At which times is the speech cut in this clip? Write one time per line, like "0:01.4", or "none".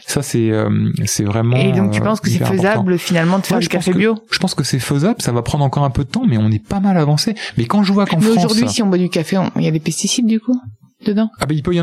none